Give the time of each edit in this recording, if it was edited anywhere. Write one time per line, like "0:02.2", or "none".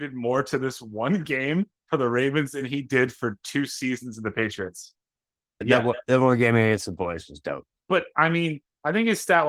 0:05.6